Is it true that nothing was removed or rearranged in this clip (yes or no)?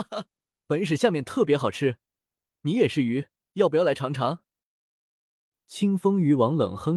yes